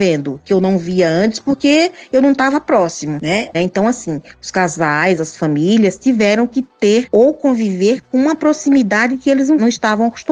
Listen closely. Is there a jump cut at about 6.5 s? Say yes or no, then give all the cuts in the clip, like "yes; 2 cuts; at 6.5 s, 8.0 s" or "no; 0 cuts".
no; 2 cuts; at 3.5 s, 5.2 s